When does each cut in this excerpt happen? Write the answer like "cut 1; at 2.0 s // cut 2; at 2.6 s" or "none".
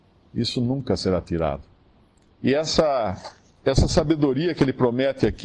none